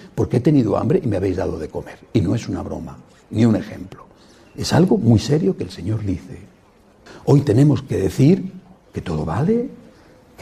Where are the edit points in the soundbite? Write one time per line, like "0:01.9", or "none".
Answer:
0:07.1